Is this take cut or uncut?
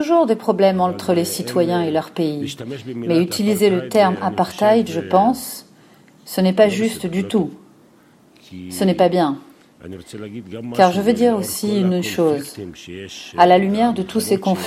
uncut